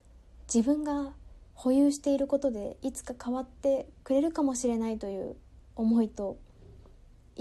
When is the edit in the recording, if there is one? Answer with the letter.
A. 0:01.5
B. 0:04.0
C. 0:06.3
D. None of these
B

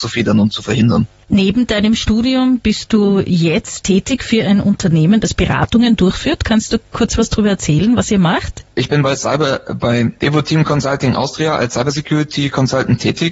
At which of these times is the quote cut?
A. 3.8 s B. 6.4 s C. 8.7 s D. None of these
A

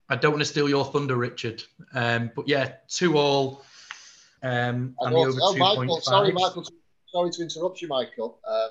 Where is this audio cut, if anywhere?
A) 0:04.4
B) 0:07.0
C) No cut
A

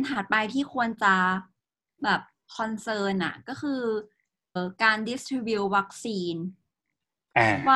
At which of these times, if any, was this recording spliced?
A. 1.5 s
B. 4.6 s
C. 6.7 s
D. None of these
B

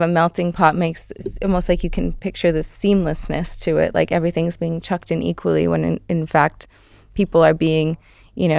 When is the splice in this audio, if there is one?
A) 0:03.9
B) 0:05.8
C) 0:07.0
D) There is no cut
D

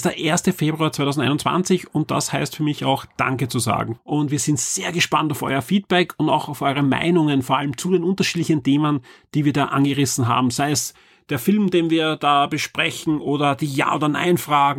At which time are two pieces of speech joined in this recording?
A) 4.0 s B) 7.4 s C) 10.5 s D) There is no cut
A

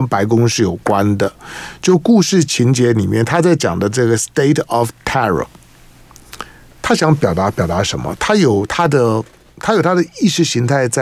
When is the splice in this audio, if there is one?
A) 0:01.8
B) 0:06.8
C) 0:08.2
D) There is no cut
D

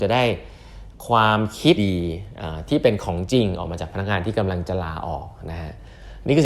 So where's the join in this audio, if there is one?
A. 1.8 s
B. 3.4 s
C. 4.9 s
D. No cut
A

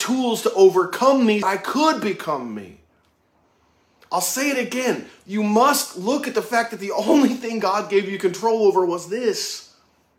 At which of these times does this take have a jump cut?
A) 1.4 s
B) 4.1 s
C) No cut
A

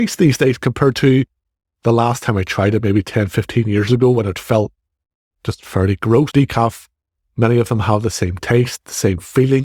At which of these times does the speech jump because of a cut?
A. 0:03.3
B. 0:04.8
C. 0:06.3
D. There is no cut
C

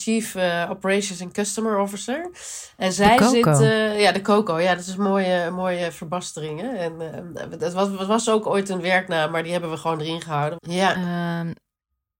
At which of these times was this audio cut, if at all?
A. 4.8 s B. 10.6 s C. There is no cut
B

